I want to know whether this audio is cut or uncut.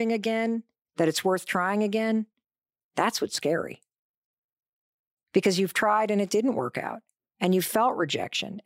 uncut